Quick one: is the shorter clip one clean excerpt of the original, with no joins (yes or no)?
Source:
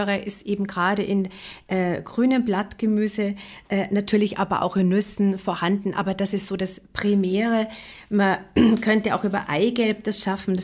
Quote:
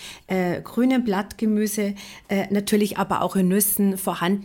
yes